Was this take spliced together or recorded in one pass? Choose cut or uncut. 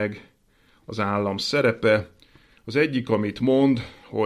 uncut